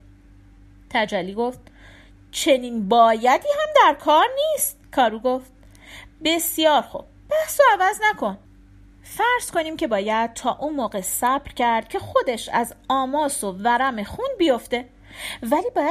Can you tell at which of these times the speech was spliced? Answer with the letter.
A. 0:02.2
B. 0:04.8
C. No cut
B